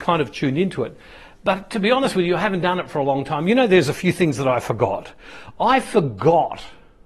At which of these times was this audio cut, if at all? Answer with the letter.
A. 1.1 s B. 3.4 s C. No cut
C